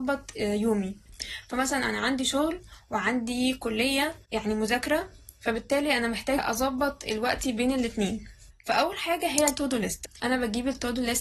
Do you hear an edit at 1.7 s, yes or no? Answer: no